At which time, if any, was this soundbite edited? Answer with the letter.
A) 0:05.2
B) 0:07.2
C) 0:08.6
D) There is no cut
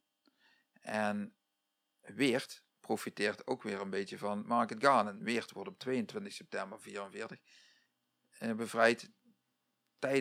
D